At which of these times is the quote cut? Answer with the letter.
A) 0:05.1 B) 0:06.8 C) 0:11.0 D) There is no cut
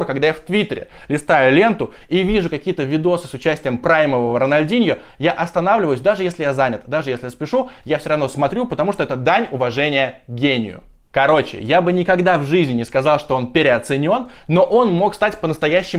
D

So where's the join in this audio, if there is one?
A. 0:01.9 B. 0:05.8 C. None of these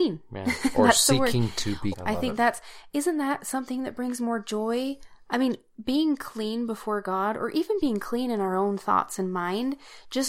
A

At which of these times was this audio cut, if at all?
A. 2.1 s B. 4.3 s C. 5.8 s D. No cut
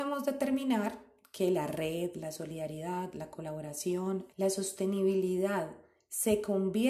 B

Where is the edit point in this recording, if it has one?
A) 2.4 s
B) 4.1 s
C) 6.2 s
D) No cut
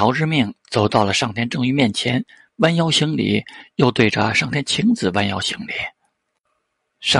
D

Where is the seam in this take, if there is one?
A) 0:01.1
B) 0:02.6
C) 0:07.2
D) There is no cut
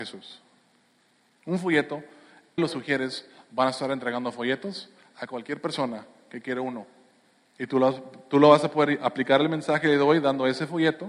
B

